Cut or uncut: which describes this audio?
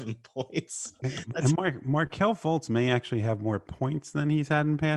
uncut